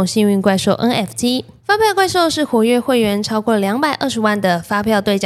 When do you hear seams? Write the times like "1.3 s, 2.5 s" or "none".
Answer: 1.6 s

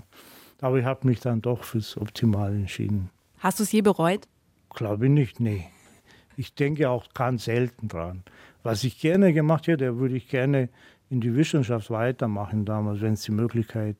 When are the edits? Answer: none

